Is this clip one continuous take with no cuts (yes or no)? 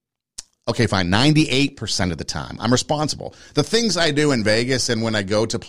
yes